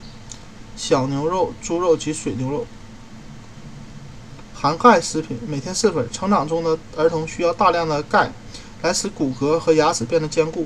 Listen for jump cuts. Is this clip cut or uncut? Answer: uncut